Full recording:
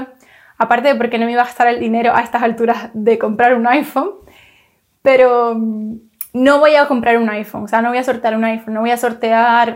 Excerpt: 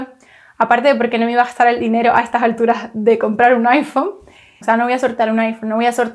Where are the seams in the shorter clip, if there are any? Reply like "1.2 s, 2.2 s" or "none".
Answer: 4.6 s